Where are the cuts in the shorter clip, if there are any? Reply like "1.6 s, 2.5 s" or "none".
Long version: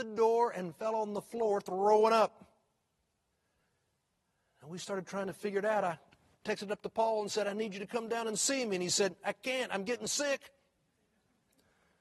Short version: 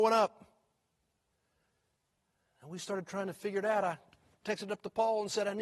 none

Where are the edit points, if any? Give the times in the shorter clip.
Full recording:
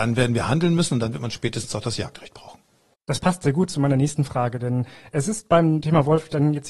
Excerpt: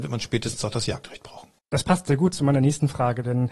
1.6 s

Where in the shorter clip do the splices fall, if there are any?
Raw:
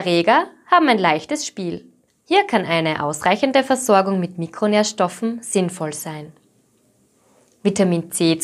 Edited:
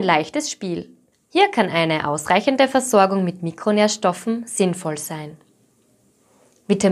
none

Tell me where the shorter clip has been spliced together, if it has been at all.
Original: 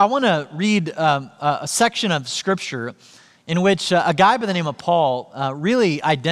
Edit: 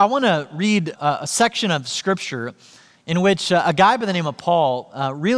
0.9 s

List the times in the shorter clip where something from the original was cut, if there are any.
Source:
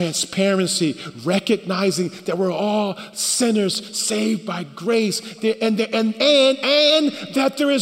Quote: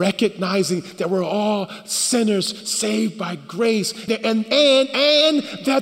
4.1 s

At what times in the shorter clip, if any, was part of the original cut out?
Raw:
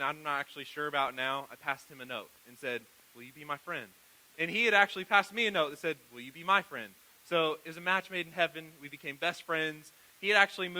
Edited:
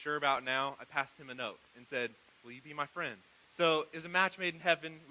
3.4 s

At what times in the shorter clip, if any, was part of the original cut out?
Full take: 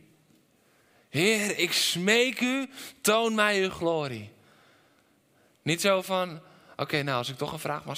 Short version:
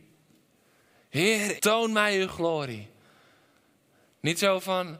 1.6 s

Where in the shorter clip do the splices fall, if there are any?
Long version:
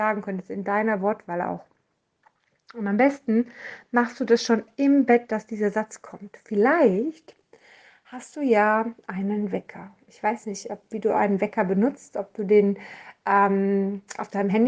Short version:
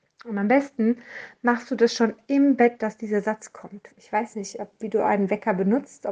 3.9 s

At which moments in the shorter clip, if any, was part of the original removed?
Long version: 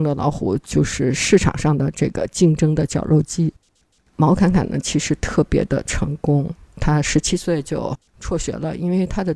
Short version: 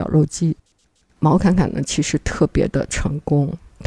none

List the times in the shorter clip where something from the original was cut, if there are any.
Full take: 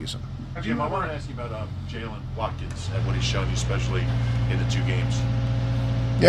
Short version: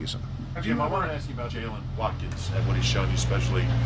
1.5 s

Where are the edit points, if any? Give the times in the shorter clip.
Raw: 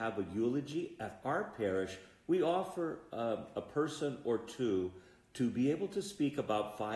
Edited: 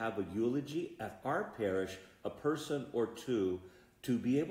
2.2 s

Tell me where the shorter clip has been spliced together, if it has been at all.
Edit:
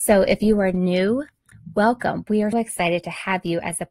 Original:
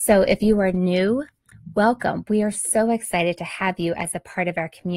2.5 s

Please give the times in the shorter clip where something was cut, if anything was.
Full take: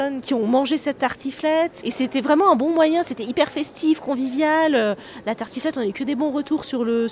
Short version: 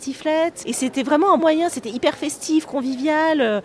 1.4 s

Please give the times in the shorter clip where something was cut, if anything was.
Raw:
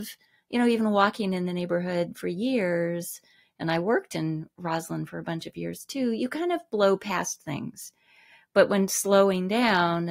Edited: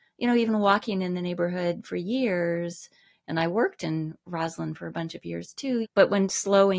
5.8 s

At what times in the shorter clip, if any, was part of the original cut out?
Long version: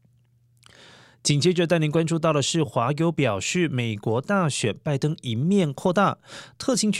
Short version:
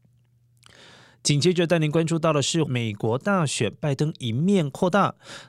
2.7 s

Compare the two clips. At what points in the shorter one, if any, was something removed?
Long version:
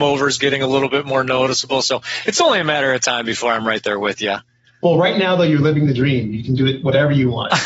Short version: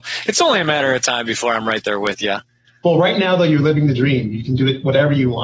none

